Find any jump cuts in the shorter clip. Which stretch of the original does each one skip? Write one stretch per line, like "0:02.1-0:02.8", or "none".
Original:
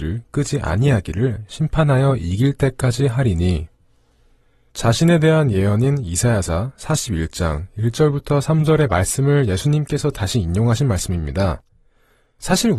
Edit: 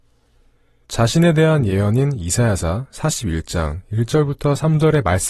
none